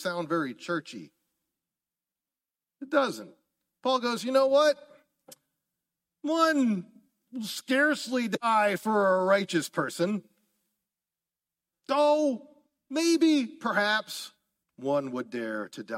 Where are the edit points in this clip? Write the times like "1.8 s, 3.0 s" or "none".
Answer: 14.6 s